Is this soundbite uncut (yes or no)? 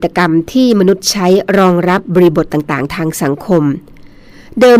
yes